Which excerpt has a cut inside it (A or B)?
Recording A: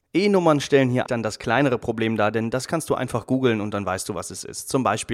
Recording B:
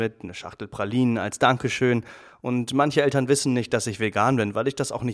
A